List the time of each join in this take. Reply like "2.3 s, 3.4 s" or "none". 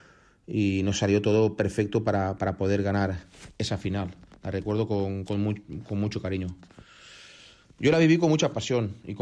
none